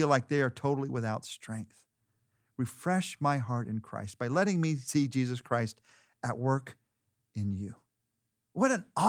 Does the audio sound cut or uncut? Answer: uncut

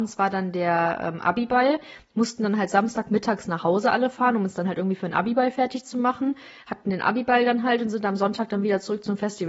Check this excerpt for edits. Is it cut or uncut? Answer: uncut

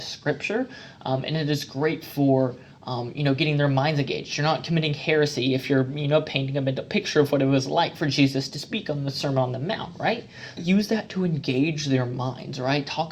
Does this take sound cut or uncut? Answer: cut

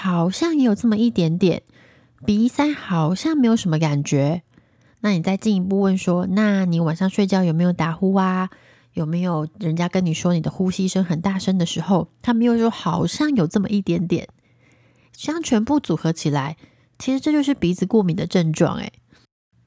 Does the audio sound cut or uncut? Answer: uncut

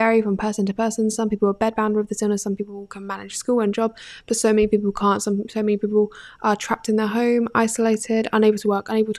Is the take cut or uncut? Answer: uncut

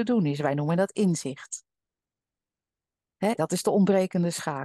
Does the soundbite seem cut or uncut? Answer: cut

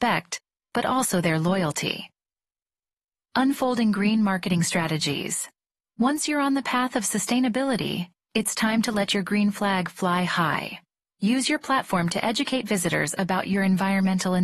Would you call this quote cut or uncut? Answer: uncut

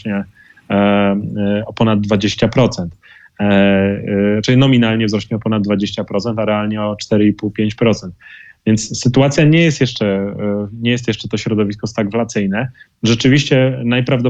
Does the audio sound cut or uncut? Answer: uncut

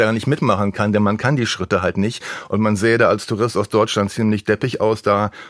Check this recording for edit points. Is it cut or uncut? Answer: uncut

